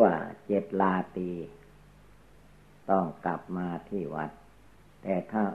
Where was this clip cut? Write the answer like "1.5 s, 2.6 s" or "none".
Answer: 2.8 s

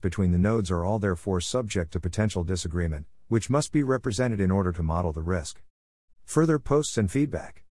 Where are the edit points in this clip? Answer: 6.1 s

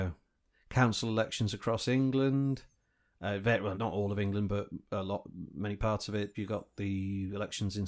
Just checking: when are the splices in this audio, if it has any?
3.7 s, 6.3 s

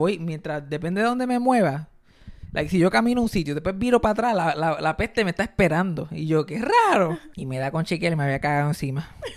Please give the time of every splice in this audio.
none

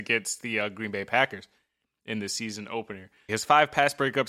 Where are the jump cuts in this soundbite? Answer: 3.3 s

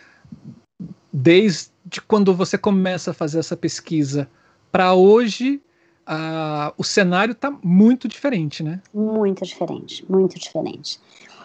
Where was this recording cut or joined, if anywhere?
none

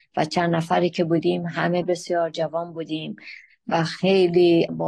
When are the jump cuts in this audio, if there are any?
1.8 s

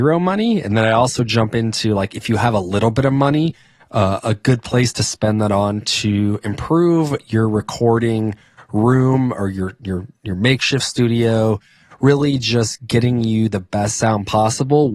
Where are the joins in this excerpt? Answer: none

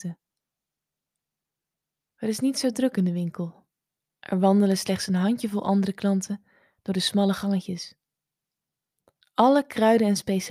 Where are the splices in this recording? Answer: none

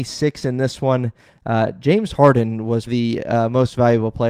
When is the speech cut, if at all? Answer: 2.9 s

